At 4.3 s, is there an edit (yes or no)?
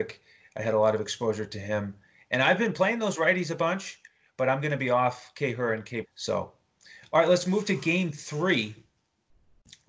no